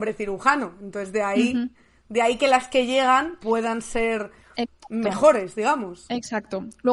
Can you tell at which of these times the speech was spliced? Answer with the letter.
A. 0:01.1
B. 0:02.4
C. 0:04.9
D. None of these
D